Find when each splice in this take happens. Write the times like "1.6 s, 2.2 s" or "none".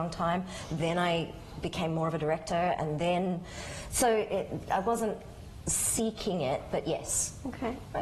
none